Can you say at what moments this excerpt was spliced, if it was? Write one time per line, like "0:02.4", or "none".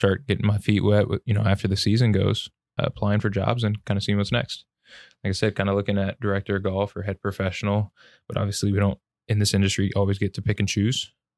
0:02.8